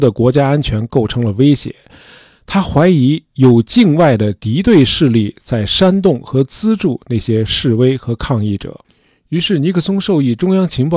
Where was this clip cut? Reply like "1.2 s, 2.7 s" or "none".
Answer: none